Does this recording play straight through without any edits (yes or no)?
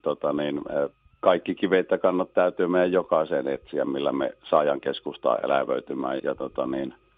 no